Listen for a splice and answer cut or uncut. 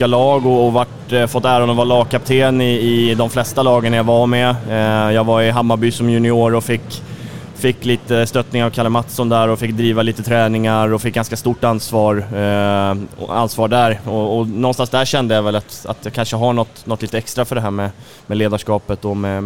uncut